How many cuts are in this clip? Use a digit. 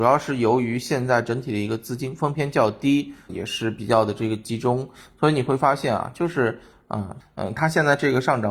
2